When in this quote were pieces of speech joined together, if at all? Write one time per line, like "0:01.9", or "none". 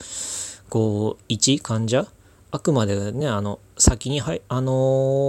none